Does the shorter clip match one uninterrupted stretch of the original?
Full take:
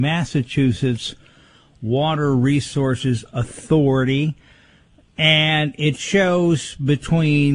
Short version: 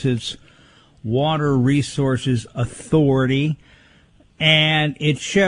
yes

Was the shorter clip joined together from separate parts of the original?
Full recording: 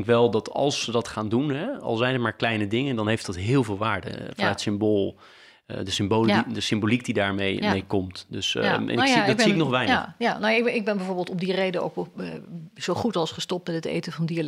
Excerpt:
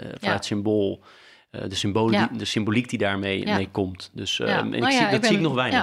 no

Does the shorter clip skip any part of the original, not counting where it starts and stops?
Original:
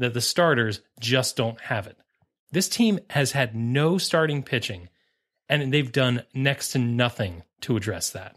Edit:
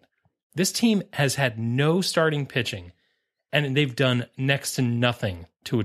no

